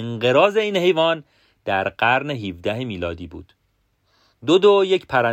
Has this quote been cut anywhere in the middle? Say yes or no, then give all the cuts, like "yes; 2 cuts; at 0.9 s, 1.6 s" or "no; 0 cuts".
no; 0 cuts